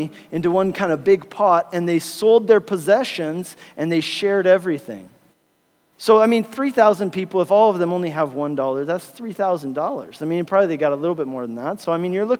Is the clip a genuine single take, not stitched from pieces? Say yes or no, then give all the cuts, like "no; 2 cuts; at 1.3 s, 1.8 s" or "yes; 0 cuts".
yes; 0 cuts